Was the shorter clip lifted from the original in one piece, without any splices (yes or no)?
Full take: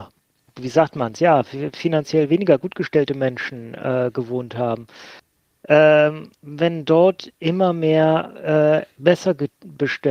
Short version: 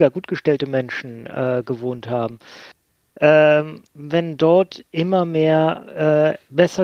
yes